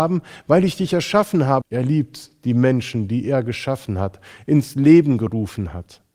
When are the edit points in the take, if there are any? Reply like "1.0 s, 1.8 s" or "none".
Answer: 1.6 s

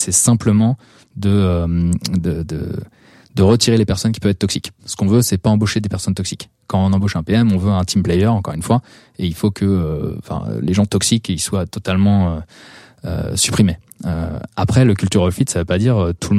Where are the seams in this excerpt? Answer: none

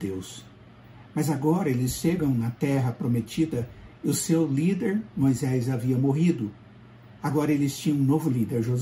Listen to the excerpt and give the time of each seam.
none

